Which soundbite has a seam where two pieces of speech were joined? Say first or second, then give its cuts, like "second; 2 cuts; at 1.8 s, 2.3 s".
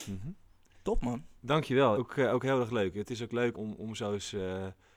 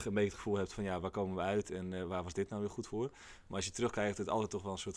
first; 2 cuts; at 1.9 s, 3.5 s